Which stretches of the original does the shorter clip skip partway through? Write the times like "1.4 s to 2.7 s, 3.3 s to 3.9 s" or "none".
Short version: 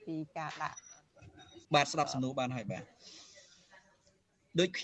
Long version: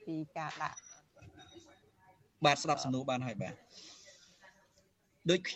1.6 s to 2.4 s